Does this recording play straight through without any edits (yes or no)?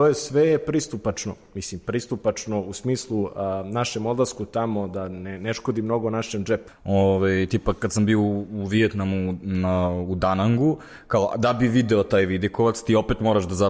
no